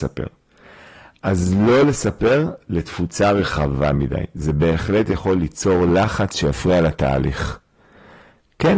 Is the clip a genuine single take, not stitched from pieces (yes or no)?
yes